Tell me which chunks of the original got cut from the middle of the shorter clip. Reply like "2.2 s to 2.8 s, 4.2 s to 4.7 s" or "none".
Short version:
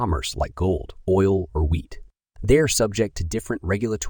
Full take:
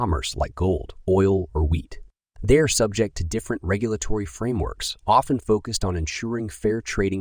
none